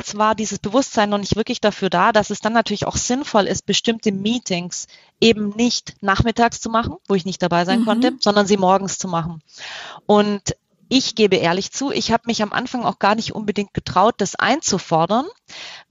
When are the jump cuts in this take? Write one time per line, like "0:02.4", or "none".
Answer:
none